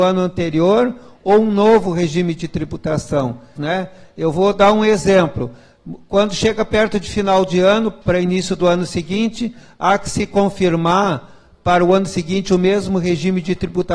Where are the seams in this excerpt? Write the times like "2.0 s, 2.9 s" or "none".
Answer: 3.6 s, 8.0 s